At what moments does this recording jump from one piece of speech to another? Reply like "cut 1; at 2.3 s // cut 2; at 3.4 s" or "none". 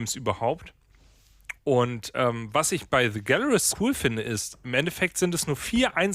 cut 1; at 1.6 s // cut 2; at 3.7 s